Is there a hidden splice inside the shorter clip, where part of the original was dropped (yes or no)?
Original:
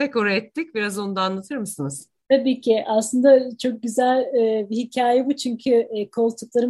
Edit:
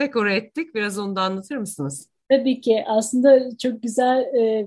no